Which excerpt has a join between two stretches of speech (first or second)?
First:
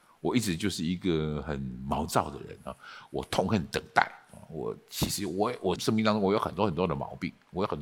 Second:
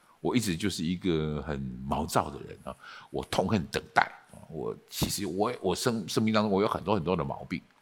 first